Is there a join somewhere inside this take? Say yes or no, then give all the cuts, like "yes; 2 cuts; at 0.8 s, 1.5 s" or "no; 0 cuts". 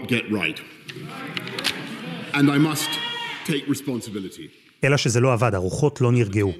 no; 0 cuts